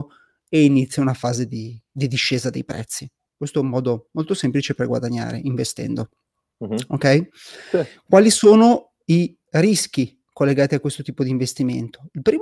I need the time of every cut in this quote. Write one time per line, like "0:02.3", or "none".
0:03.3